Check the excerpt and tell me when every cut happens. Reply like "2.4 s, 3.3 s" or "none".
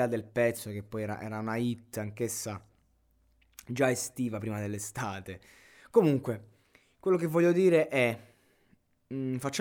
none